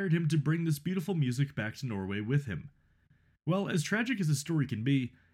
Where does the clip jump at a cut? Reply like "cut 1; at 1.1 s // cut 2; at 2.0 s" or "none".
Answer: none